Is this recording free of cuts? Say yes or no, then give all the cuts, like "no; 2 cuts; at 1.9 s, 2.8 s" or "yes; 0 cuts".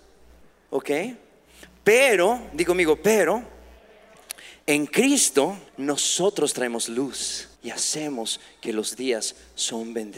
no; 2 cuts; at 5.7 s, 7.5 s